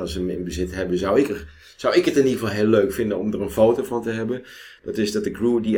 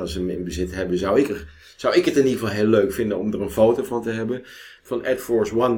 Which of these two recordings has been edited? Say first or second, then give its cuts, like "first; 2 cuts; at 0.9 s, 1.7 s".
second; 1 cut; at 4.8 s